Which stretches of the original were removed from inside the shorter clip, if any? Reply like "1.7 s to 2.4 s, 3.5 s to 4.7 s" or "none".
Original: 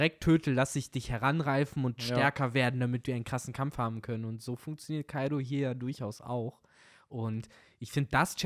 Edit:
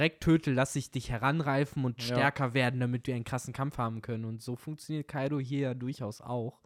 none